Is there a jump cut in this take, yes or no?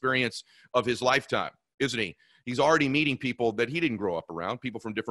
no